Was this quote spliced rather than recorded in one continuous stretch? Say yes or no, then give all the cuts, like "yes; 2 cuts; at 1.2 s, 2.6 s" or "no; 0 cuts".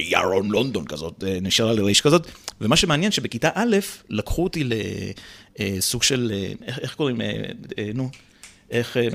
no; 0 cuts